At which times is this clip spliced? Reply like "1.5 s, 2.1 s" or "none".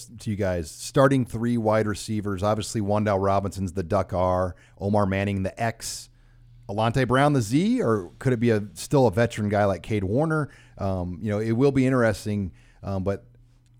none